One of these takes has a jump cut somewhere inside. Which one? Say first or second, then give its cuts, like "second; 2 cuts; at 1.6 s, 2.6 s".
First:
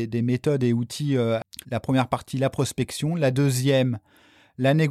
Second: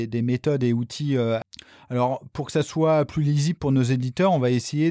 first; 1 cut; at 1.6 s